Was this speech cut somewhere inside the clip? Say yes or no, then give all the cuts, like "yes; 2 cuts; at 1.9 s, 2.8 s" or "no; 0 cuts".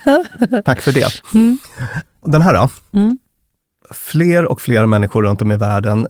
yes; 1 cut; at 2.1 s